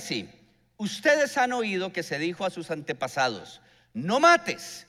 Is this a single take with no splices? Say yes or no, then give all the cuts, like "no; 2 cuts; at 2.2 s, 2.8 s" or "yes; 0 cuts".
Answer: yes; 0 cuts